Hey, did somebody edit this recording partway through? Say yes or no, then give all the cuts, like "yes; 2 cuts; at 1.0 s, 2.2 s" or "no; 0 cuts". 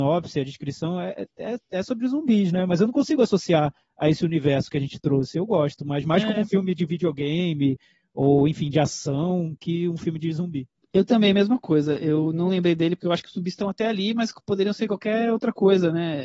no; 0 cuts